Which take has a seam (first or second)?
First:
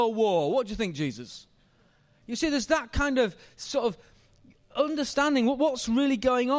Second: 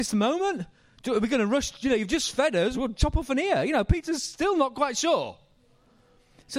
second